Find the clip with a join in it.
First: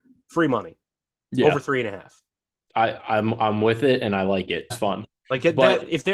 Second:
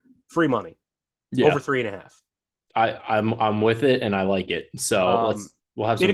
first; 1 cut; at 4.7 s

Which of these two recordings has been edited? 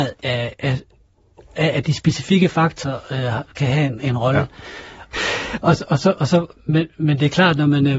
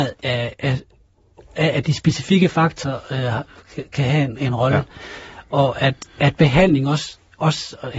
first; 2 cuts; at 3.5 s, 5.1 s

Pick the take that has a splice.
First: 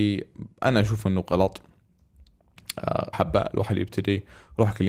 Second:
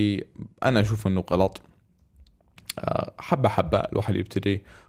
first; 1 cut; at 3.1 s

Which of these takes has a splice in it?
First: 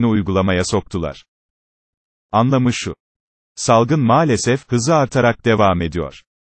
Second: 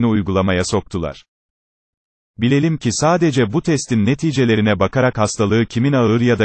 first; 1 cut; at 2.1 s

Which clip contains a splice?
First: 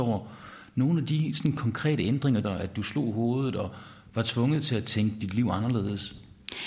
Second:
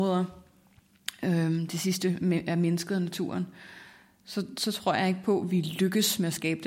first; 1 cut; at 2.4 s

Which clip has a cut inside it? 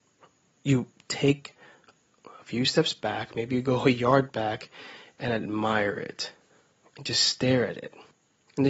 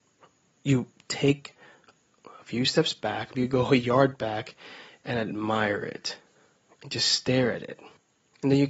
second; 1 cut; at 3.3 s

